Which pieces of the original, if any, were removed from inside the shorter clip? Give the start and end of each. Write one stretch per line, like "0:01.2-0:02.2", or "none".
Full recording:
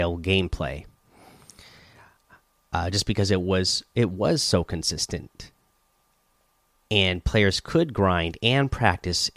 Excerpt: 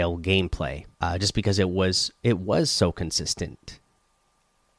0:00.9-0:02.7